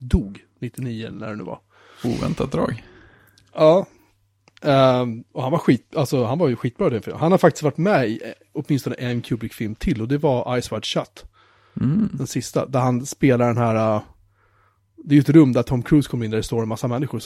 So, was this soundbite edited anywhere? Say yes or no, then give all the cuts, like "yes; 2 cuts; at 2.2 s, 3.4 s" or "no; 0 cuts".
no; 0 cuts